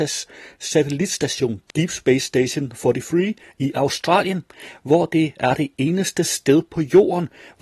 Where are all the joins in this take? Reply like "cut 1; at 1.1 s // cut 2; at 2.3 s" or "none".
none